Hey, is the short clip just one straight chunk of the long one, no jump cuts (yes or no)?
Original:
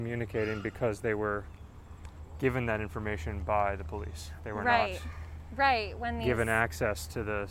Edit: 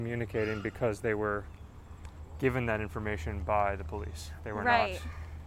yes